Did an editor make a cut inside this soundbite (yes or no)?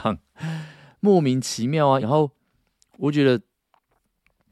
yes